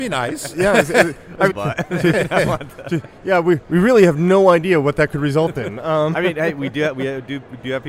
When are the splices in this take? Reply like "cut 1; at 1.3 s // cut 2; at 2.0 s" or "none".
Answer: cut 1; at 1.5 s // cut 2; at 6.1 s